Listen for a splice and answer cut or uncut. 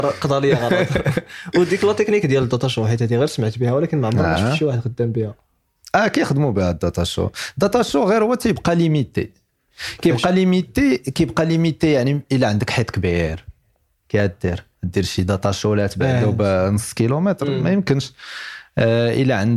cut